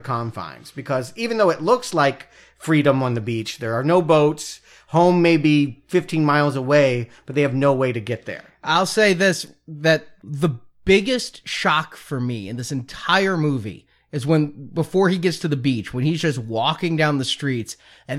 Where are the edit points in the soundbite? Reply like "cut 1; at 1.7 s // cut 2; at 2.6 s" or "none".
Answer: none